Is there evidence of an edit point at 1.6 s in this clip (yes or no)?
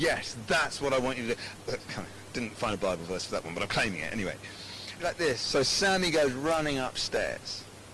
yes